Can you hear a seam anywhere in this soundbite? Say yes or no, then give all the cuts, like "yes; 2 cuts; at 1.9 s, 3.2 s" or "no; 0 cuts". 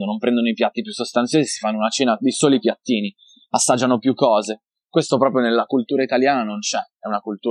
no; 0 cuts